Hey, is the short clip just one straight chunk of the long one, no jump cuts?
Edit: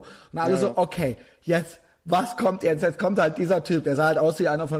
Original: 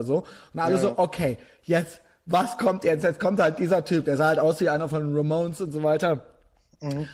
yes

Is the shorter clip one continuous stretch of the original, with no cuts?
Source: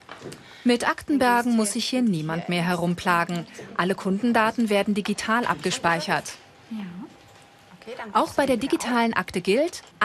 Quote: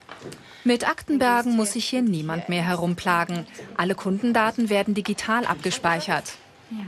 yes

